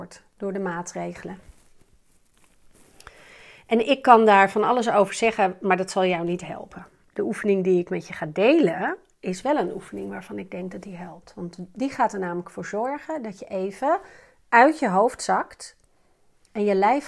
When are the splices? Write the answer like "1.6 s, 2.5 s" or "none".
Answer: none